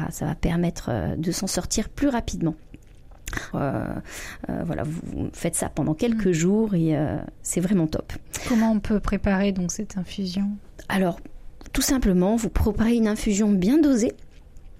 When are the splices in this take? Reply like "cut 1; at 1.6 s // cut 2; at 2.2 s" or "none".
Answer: cut 1; at 3.5 s

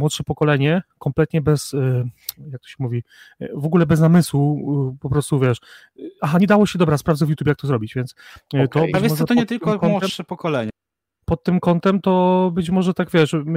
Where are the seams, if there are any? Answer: none

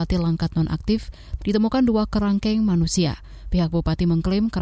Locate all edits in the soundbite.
cut 1; at 1.4 s

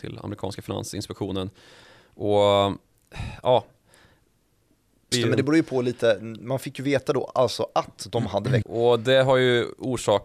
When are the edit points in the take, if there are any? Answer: cut 1; at 5.1 s // cut 2; at 8.6 s

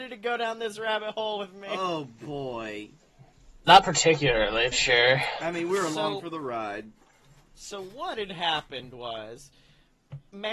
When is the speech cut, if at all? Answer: cut 1; at 4.7 s

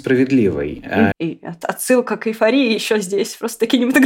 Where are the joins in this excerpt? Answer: cut 1; at 1.1 s

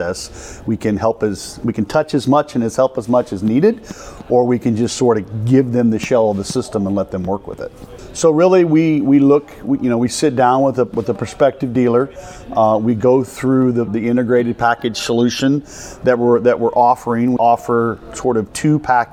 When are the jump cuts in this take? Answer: cut 1; at 13.9 s // cut 2; at 17.4 s

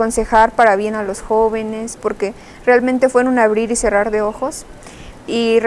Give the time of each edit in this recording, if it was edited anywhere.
cut 1; at 2.0 s

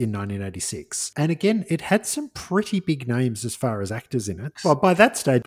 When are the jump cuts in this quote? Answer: cut 1; at 4.6 s

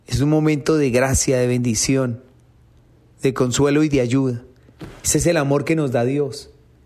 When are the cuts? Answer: none

